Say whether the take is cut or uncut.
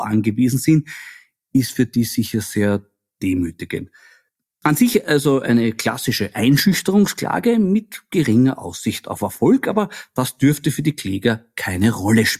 uncut